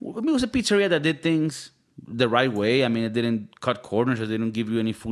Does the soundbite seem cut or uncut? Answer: uncut